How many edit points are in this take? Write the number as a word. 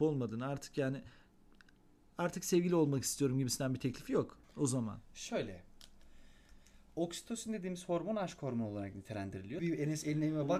two